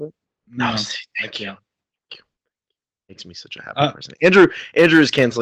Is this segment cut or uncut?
uncut